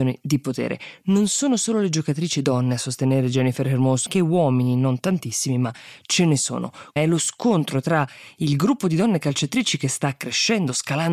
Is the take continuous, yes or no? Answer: no